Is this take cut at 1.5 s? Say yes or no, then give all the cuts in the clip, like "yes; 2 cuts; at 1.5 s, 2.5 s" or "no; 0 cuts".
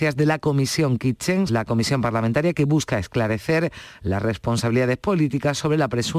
yes; 1 cut; at 1.5 s